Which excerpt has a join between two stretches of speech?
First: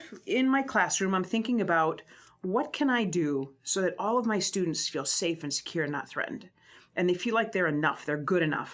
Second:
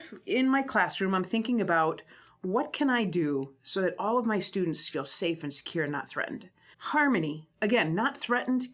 second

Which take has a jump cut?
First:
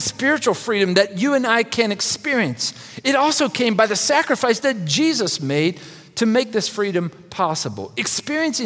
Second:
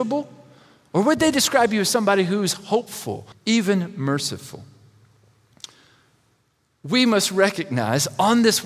second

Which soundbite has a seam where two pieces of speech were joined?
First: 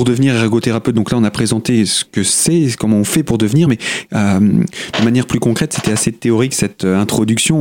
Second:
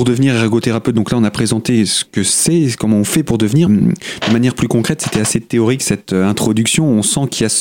second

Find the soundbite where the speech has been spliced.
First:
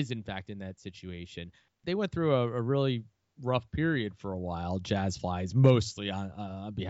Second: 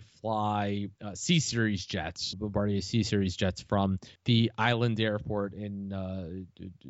second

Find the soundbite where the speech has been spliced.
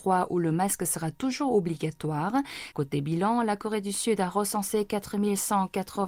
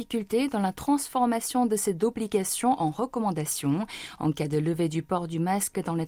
first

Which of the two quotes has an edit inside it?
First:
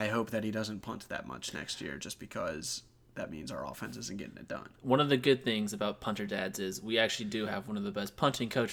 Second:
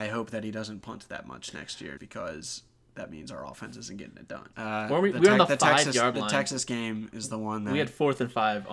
second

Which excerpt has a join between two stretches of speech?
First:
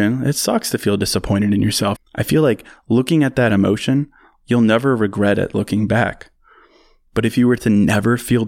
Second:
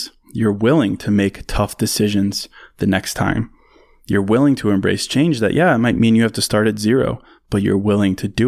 first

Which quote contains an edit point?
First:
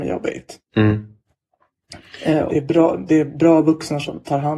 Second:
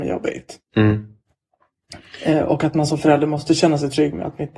first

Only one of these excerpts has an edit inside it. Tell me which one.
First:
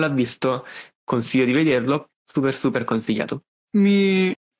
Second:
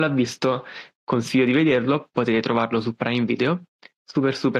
first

